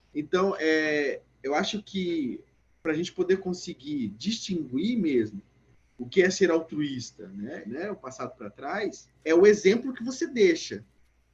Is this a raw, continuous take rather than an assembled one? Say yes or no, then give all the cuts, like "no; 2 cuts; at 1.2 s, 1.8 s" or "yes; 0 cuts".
no; 2 cuts; at 7.6 s, 9.1 s